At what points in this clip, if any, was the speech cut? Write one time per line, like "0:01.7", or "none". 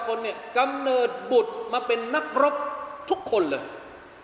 none